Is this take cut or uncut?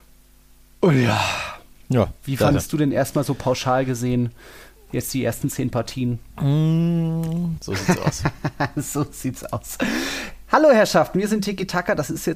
cut